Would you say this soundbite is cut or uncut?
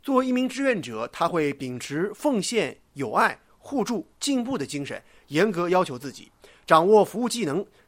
uncut